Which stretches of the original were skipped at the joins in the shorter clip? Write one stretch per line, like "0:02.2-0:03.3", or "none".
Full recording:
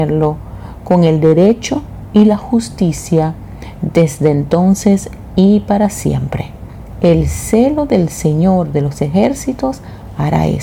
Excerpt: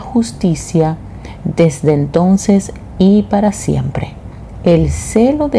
none